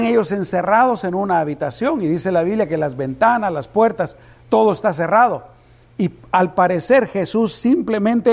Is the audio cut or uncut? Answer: uncut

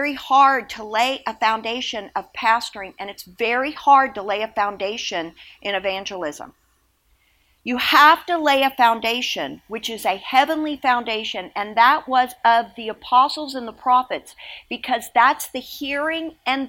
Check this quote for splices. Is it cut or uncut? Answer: uncut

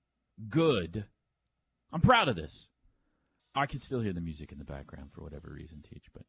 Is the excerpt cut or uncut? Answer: cut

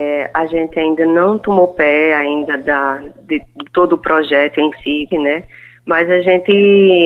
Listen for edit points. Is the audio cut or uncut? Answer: cut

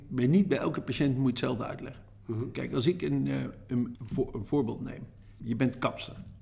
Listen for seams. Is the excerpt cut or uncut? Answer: cut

